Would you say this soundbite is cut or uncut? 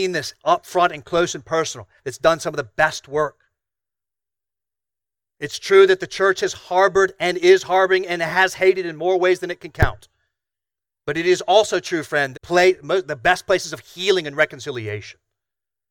cut